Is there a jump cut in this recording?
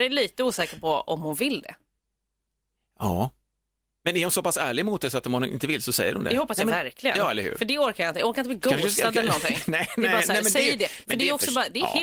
no; 0 cuts

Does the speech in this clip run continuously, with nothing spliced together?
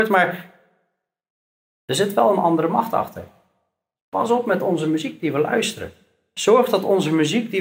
yes; 0 cuts

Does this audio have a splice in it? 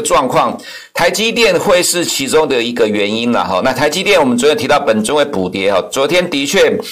no; 0 cuts

